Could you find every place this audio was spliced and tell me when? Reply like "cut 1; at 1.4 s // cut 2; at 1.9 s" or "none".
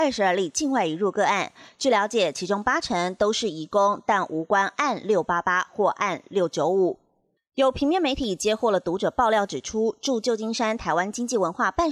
cut 1; at 7.4 s